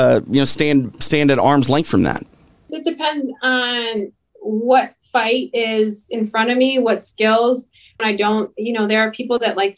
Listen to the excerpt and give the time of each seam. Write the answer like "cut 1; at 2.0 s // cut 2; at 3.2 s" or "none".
cut 1; at 2.7 s // cut 2; at 8.0 s

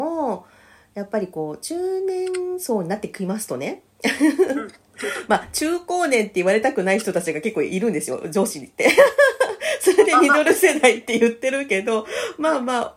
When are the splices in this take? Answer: none

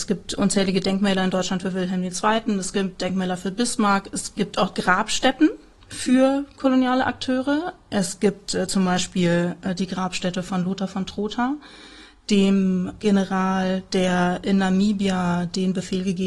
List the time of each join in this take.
none

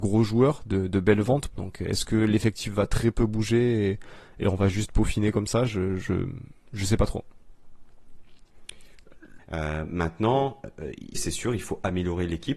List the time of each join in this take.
cut 1; at 1.5 s // cut 2; at 9.4 s // cut 3; at 11.1 s

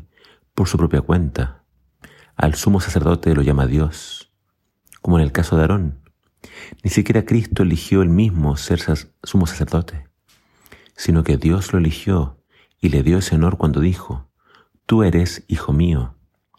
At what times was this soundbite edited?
none

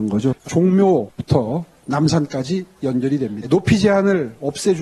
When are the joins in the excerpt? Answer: cut 1; at 3.4 s

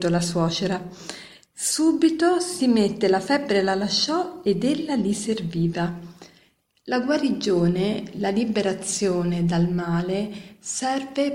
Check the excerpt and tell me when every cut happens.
cut 1; at 1.5 s

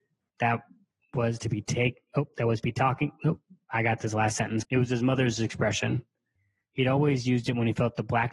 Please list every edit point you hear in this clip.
cut 1; at 4.6 s

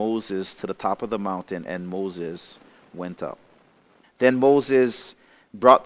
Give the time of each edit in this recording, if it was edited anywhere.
cut 1; at 4.0 s

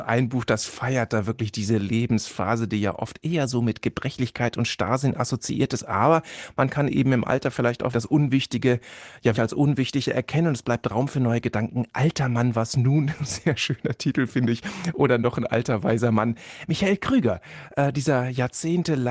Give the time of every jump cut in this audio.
cut 1; at 7.9 s // cut 2; at 9.3 s

